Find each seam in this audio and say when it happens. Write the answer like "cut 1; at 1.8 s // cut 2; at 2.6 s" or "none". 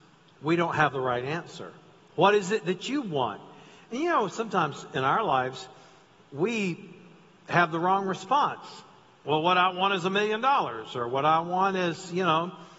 cut 1; at 2.0 s